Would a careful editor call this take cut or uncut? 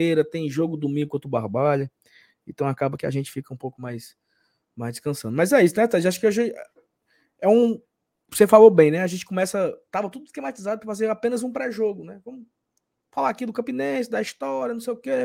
uncut